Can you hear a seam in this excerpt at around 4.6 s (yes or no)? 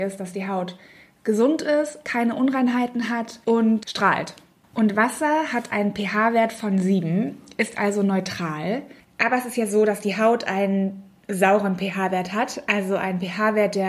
yes